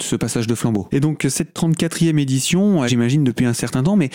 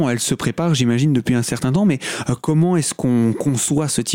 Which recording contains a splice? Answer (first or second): first